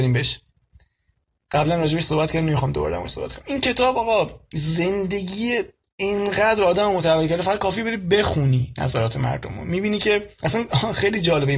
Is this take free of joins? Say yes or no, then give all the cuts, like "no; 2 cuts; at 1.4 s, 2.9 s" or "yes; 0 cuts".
yes; 0 cuts